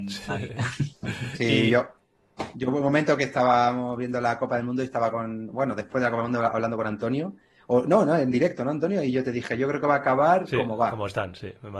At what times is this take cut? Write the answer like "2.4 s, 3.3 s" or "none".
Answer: none